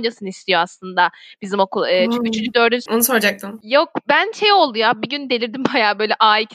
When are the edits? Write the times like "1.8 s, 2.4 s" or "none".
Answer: 2.9 s